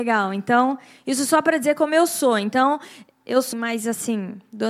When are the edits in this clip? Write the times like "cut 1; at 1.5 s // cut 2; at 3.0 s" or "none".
cut 1; at 3.5 s